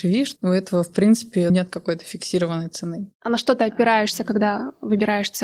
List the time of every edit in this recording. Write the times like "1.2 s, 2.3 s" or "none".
1.5 s